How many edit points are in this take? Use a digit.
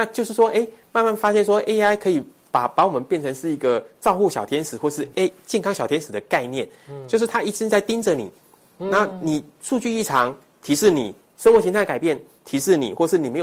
1